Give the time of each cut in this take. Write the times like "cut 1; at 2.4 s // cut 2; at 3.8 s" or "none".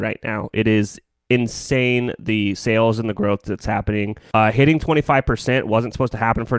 cut 1; at 4.3 s